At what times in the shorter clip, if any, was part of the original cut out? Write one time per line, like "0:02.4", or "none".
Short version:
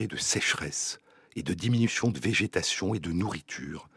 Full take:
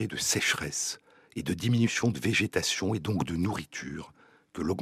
0:03.0

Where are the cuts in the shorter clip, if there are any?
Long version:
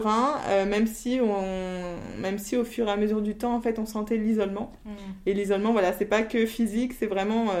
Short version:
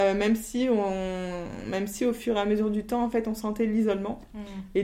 none

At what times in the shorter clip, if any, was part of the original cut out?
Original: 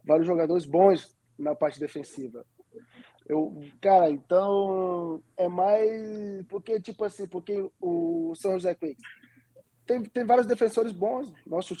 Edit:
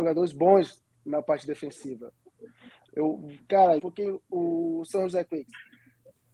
0:03.8

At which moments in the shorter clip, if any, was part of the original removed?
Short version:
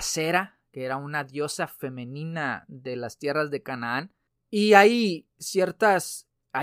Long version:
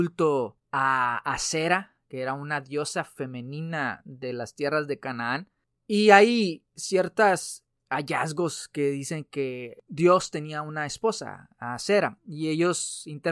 none

